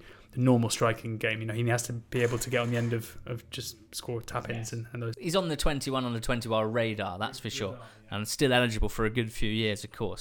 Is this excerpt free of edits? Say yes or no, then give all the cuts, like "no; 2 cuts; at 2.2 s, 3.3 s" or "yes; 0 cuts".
yes; 0 cuts